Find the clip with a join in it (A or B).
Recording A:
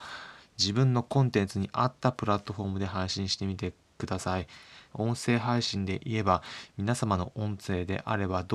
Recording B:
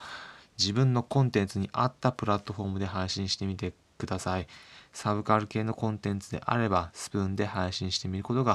A